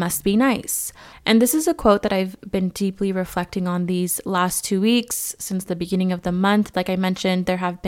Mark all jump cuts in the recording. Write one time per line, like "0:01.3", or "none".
0:01.1
0:06.7